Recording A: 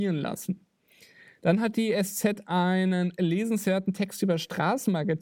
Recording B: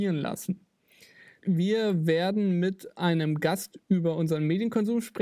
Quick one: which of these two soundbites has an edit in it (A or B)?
B